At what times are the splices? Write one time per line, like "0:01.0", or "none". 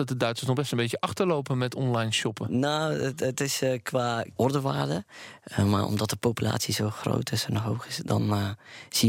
0:04.4